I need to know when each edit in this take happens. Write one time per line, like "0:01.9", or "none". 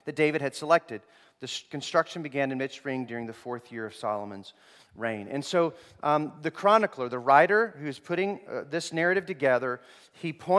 none